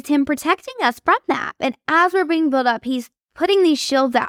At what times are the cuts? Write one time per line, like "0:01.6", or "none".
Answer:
0:01.6